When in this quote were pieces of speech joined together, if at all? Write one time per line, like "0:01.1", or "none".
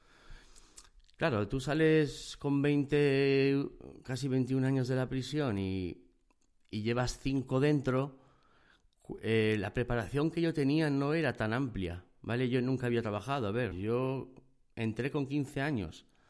0:13.7